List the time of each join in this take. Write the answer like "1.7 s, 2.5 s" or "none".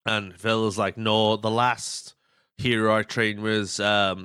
none